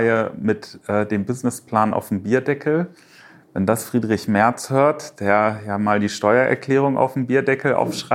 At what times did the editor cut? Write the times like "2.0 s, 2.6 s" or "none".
none